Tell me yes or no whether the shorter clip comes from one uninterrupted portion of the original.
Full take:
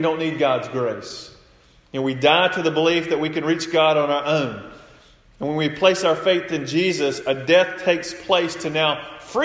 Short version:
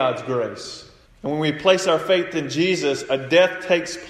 no